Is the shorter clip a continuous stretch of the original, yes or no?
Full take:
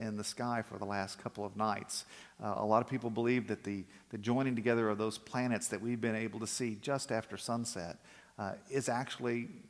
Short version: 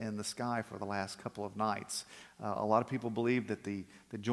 yes